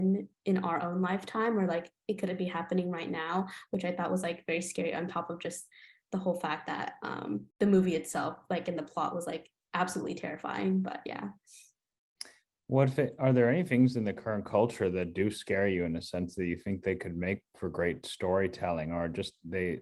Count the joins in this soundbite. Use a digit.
1